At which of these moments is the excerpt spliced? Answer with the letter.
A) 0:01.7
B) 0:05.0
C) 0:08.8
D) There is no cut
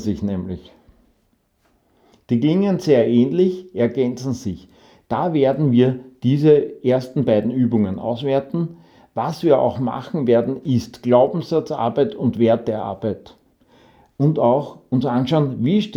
D